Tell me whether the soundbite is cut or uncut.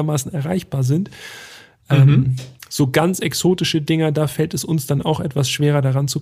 uncut